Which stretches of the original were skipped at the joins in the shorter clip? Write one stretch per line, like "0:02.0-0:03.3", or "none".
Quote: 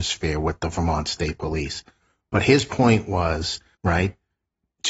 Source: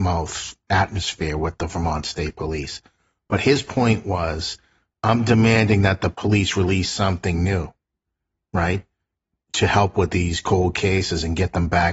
0:04.7-0:08.4